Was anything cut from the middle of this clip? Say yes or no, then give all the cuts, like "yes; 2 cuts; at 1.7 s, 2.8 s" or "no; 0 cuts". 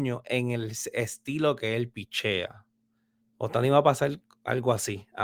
yes; 1 cut; at 3.2 s